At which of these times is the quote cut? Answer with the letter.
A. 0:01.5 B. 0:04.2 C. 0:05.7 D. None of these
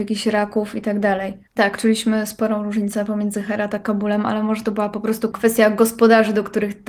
A